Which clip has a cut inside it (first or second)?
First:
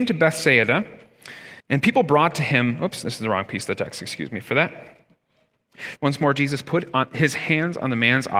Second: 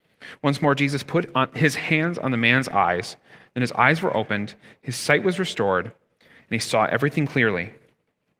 first